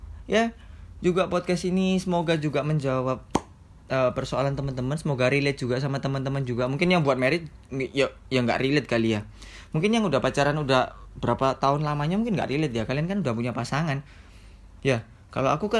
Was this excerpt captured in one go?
yes; 0 cuts

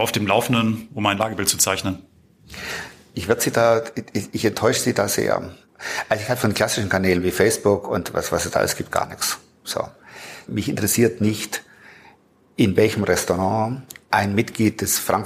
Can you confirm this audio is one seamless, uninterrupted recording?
no; 2 cuts; at 10.5 s, 14.0 s

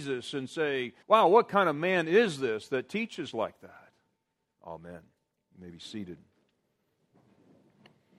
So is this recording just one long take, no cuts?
no; 2 cuts; at 1.0 s, 4.6 s

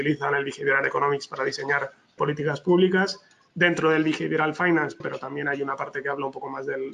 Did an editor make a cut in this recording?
yes; 2 cuts; at 2.2 s, 5.0 s

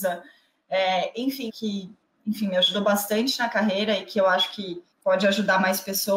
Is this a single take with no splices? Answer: no; 2 cuts; at 1.5 s, 4.9 s

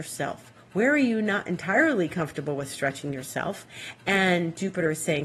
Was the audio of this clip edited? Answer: no; 0 cuts

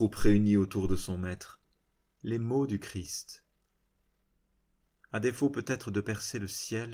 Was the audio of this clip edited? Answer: yes; 1 cut; at 2.2 s

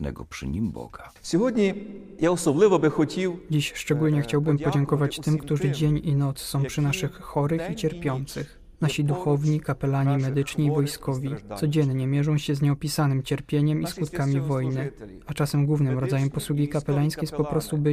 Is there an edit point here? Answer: no; 0 cuts

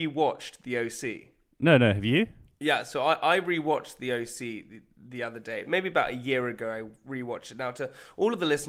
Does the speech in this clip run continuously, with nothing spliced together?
yes; 0 cuts

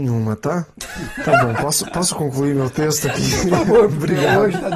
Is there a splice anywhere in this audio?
no; 0 cuts

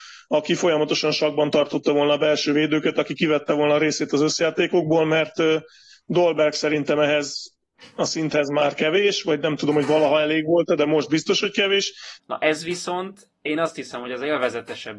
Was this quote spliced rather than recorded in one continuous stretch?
yes; 1 cut; at 12.2 s

